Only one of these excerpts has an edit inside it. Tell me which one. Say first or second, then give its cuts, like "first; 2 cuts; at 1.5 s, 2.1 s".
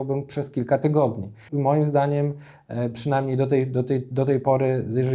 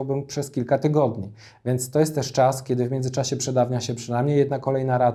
first; 1 cut; at 1.5 s